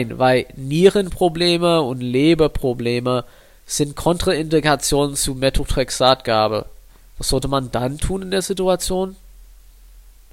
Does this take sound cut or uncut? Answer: uncut